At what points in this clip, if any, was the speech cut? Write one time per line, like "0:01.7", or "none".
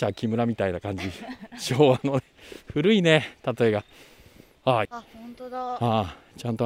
0:04.9